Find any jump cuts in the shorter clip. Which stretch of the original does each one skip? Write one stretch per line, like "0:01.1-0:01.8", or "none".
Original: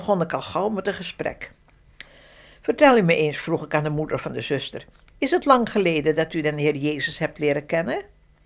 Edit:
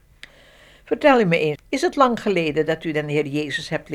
0:03.3-0:05.0